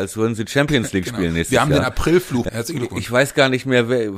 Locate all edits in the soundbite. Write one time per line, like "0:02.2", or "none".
0:02.5